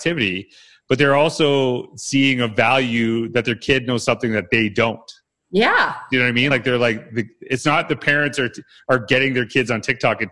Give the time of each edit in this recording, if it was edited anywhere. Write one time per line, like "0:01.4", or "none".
none